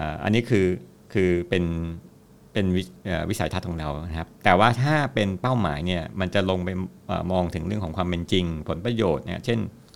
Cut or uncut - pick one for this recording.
uncut